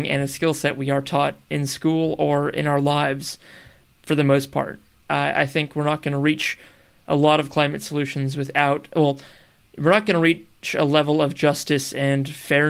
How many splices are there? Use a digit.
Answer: 1